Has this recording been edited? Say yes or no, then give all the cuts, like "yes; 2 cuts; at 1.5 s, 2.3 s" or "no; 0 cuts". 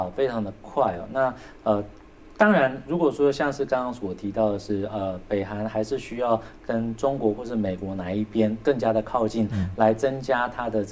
no; 0 cuts